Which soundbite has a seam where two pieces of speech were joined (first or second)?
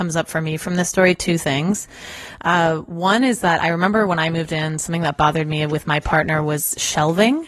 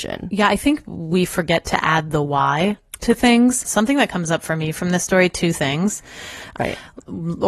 second